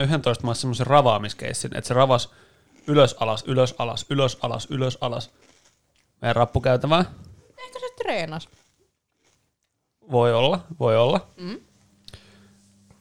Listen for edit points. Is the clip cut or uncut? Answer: uncut